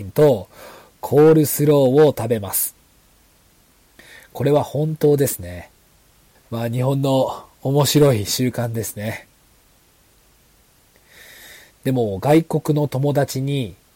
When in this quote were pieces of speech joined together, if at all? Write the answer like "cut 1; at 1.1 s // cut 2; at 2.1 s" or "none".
cut 1; at 6.3 s // cut 2; at 11.7 s